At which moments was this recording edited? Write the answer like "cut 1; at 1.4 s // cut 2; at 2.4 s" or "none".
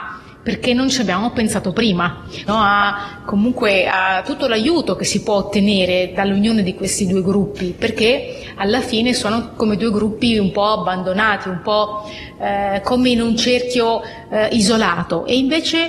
cut 1; at 2.5 s